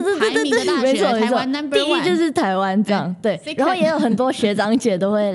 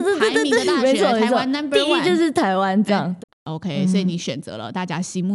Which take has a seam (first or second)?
second